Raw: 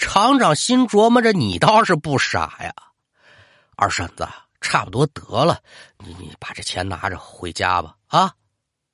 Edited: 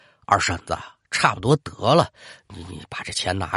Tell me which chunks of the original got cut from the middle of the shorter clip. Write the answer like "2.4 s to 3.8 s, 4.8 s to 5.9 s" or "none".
none